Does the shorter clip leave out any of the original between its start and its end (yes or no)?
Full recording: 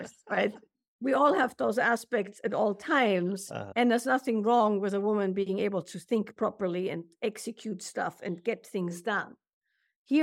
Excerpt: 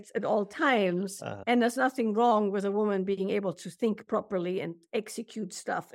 no